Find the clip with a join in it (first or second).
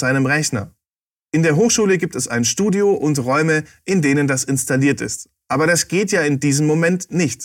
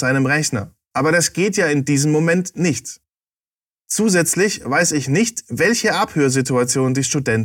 second